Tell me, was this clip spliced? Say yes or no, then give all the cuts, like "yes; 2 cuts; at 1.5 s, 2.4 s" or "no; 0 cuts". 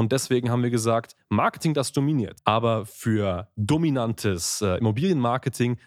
yes; 1 cut; at 2.4 s